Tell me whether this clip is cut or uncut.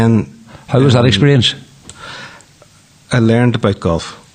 uncut